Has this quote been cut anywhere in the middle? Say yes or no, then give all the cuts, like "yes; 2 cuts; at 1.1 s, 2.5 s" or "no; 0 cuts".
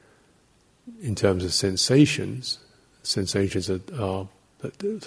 no; 0 cuts